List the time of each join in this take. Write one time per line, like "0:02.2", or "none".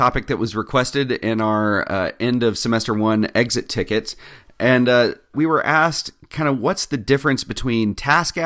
0:05.3